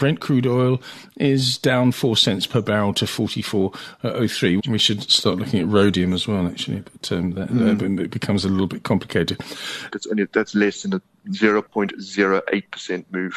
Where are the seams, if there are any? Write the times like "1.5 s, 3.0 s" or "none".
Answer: 4.6 s, 9.9 s

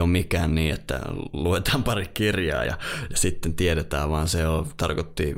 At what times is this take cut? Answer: none

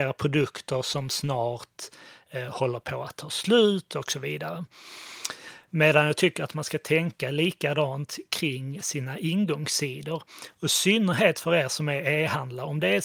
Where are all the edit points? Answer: none

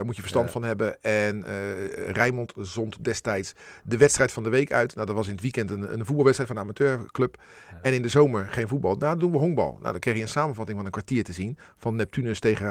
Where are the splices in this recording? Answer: none

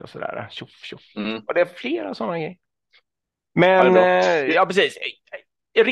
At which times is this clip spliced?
none

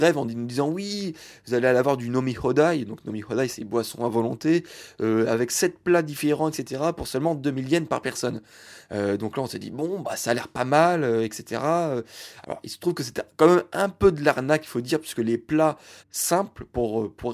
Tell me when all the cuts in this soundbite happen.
12.4 s, 16.0 s

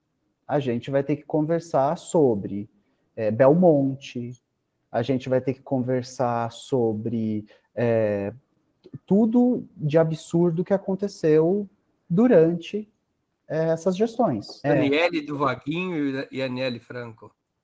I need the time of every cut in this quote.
14.6 s

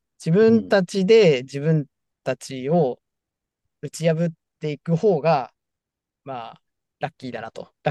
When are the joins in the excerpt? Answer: none

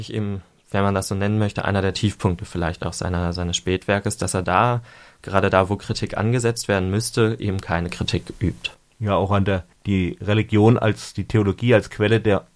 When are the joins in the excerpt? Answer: none

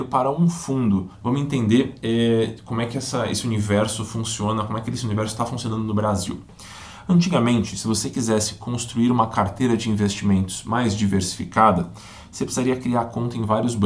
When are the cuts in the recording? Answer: 1.1 s

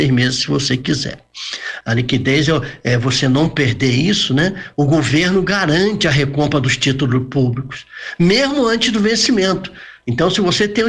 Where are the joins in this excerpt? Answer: 1.8 s

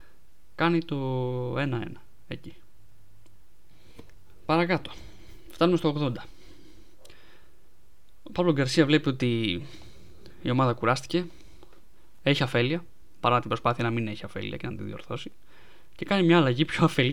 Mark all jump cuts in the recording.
none

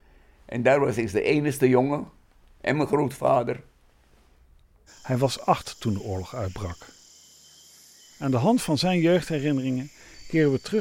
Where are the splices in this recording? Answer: 4.9 s

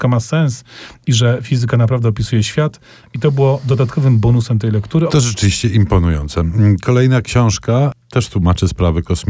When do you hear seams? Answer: 5.1 s

